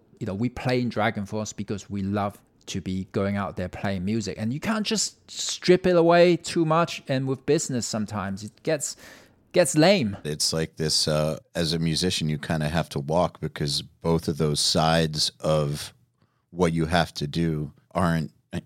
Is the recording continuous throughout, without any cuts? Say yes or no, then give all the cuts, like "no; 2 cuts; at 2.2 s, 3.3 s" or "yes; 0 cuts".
no; 2 cuts; at 10.2 s, 11.4 s